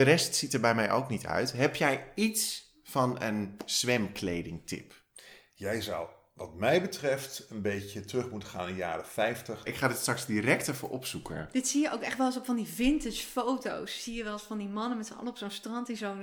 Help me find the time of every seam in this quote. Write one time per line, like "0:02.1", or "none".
0:09.6